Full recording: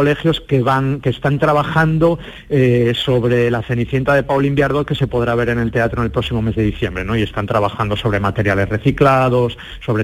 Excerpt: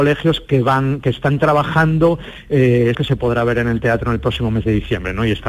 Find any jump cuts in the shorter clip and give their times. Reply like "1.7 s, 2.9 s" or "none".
2.9 s